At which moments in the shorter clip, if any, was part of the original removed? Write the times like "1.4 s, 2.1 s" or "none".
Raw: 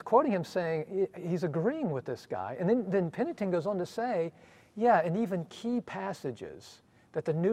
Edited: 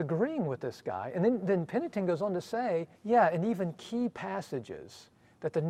3.0 s